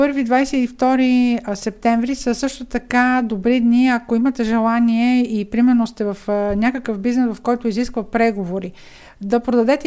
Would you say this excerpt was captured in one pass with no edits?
yes; 0 cuts

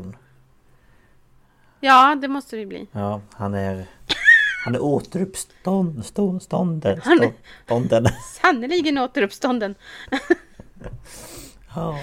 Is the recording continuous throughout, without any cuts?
yes; 0 cuts

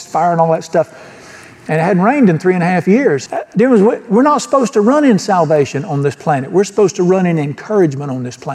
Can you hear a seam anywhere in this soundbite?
yes; 1 cut; at 3.3 s

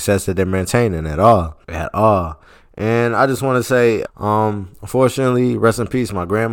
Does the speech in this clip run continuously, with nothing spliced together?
no; 2 cuts; at 1.6 s, 4.1 s

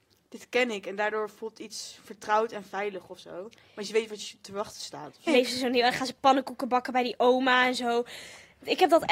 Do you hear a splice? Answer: yes; 1 cut; at 5.3 s

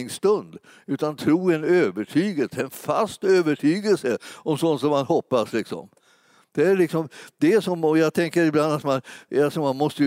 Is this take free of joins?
yes; 0 cuts

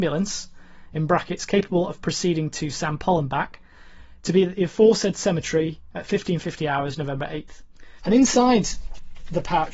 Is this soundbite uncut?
no; 1 cut; at 8.0 s

